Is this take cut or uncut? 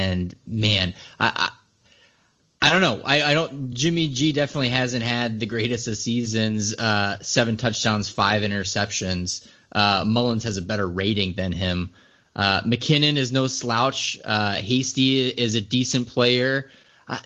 uncut